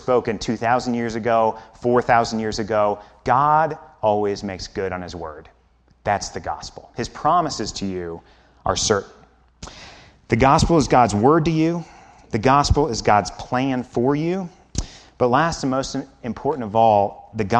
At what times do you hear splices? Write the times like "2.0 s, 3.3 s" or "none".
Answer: none